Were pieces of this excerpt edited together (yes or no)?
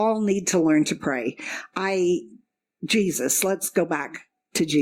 no